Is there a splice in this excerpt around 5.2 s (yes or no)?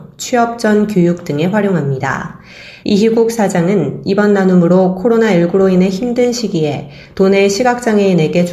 no